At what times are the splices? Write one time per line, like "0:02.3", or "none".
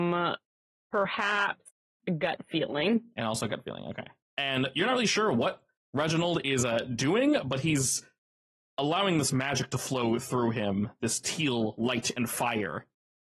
0:04.3